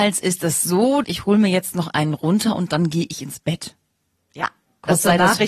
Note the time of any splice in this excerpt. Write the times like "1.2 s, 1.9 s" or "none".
1.0 s